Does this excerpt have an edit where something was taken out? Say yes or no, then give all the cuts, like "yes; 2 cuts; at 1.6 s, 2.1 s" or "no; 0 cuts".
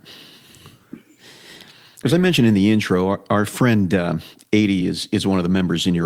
no; 0 cuts